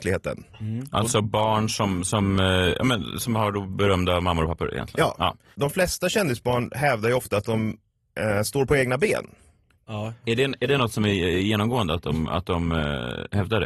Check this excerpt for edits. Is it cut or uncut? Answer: uncut